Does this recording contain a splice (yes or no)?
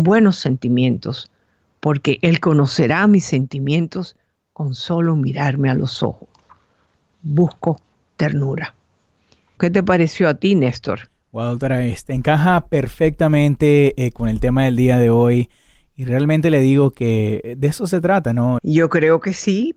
yes